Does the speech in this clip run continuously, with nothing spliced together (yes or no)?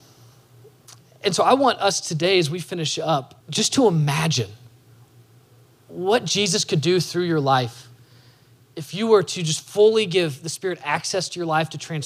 no